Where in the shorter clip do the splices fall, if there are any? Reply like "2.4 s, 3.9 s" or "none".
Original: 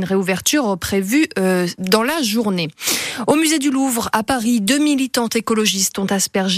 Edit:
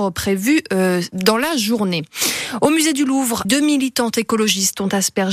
3.4 s